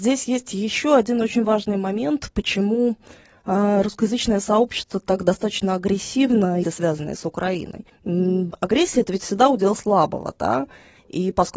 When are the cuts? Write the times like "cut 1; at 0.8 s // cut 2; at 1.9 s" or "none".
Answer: cut 1; at 6.6 s